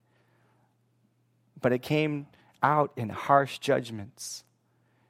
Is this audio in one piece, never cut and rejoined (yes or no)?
yes